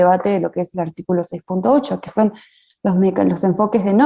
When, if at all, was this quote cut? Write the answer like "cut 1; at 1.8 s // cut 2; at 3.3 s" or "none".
none

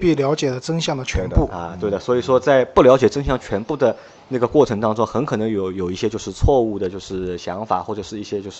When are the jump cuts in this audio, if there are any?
none

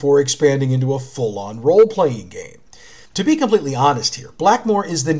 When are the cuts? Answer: cut 1; at 3.0 s

